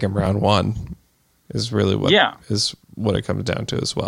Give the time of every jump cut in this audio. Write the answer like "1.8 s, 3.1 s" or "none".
1.3 s